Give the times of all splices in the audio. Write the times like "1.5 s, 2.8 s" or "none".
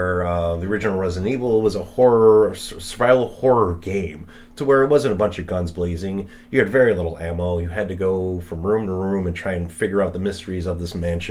none